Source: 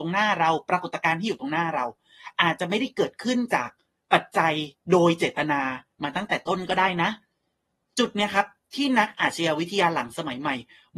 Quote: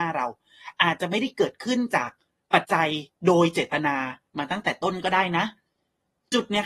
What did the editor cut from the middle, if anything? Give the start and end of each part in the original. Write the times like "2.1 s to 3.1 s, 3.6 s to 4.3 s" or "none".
4.2 s to 4.3 s